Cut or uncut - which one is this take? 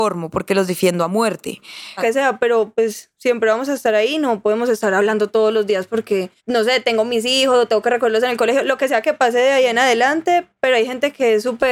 cut